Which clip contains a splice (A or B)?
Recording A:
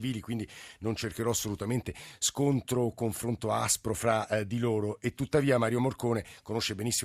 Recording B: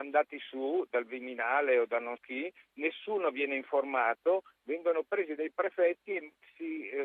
B